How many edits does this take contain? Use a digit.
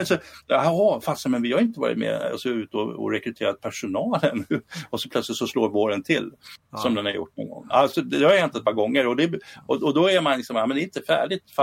0